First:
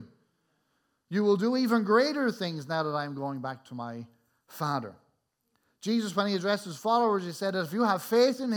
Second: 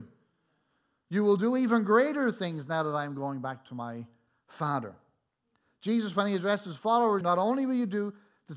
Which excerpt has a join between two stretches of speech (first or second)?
second